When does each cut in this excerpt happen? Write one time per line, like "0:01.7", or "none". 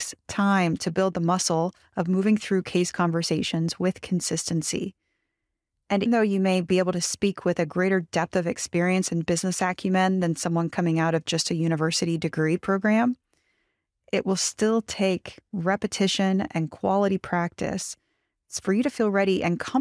0:06.1